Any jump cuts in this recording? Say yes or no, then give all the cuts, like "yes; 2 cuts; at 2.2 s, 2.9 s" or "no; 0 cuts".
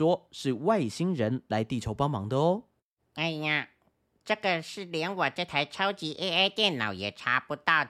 no; 0 cuts